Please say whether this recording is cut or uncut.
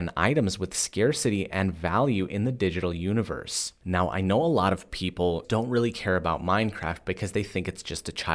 cut